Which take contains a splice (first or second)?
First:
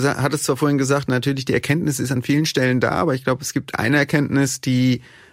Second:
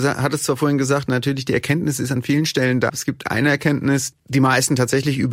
second